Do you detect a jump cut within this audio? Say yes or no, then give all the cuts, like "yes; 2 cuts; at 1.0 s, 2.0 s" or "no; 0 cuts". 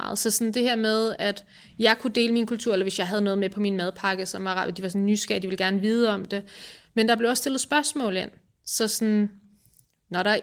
no; 0 cuts